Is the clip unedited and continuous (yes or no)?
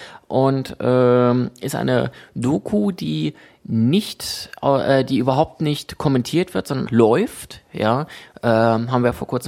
no